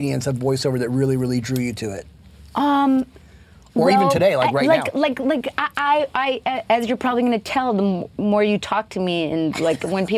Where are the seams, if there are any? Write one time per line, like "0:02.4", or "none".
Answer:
none